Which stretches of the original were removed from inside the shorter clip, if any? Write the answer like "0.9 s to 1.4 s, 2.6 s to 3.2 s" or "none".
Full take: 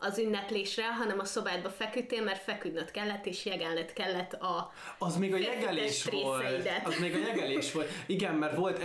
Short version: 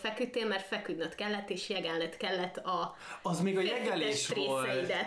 none